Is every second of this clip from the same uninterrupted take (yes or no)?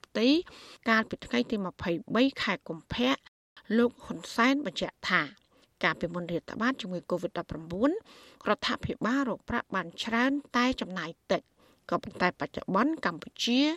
yes